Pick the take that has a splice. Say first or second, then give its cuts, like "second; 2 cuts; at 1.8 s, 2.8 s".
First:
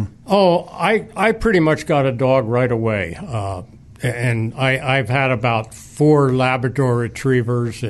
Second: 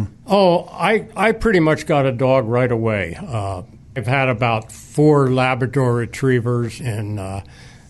second; 2 cuts; at 4.0 s, 6.8 s